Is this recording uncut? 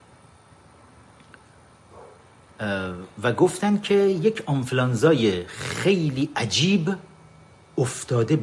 yes; 0 cuts

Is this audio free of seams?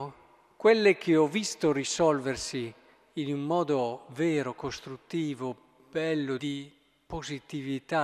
no; 1 cut; at 6.4 s

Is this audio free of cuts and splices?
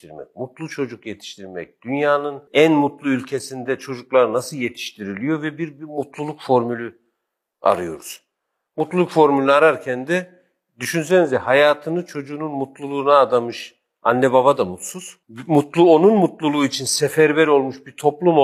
yes; 0 cuts

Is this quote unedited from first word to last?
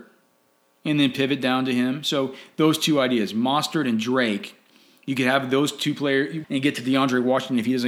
no; 1 cut; at 6.4 s

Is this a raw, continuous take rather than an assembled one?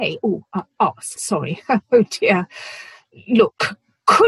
no; 1 cut; at 1.2 s

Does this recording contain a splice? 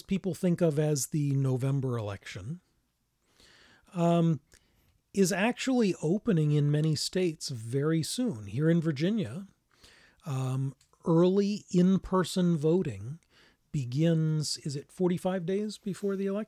no; 0 cuts

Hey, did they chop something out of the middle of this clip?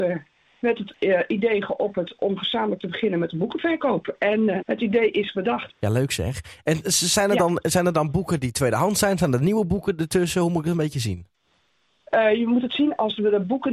yes; 2 cuts; at 4.6 s, 5.7 s

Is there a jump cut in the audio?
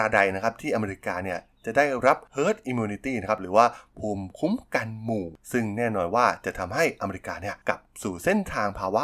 no; 0 cuts

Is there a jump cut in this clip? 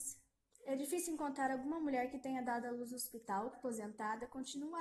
yes; 1 cut; at 3.5 s

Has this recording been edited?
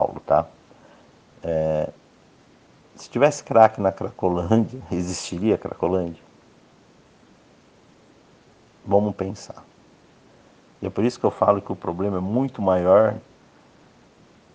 no; 0 cuts

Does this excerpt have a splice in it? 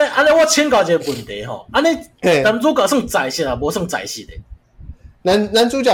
no; 0 cuts

